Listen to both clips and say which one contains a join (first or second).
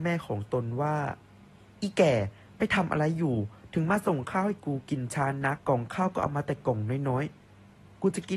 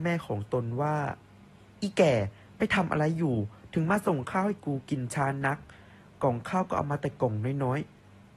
first